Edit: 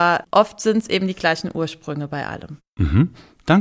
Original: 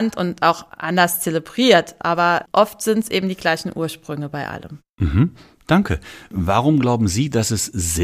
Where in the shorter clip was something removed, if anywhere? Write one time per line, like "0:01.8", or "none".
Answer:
none